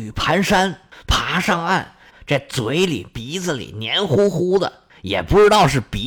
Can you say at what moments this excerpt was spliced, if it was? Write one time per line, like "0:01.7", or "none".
0:02.1